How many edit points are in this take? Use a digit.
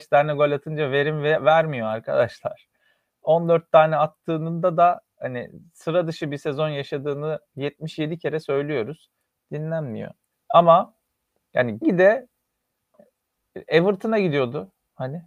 2